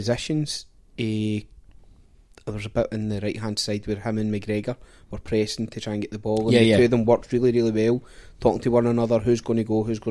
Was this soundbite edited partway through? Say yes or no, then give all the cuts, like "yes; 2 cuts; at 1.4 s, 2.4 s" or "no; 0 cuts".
no; 0 cuts